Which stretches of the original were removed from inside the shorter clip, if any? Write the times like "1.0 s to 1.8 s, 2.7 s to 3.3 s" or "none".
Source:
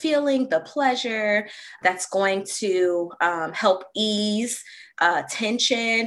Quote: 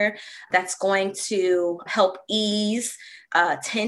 3.2 s to 3.5 s